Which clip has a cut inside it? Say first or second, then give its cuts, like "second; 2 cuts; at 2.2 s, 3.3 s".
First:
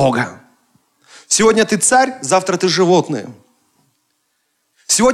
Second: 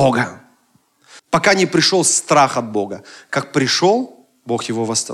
second; 1 cut; at 1.2 s